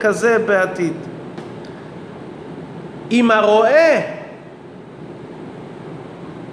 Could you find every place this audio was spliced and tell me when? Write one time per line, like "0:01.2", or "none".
none